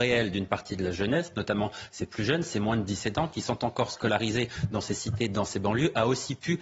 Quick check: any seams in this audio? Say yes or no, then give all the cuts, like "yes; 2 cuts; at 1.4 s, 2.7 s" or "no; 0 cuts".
no; 0 cuts